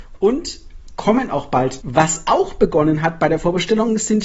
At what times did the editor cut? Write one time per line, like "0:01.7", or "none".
0:01.8